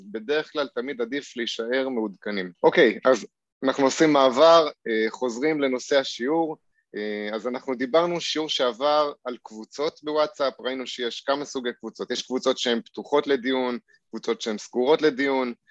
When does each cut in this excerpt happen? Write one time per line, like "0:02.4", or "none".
0:02.5